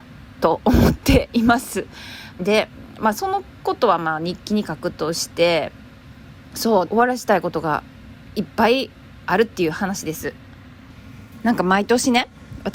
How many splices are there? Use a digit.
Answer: 2